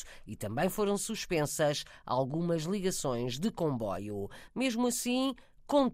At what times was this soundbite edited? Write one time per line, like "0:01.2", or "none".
0:04.5